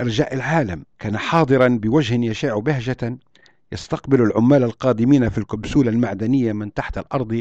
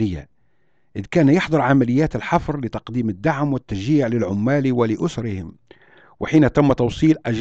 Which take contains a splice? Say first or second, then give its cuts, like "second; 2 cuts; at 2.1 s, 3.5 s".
first; 1 cut; at 0.9 s